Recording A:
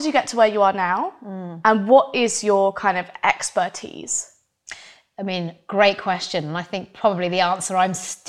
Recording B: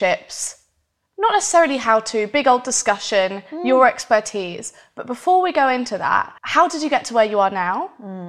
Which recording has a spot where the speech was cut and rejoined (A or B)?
B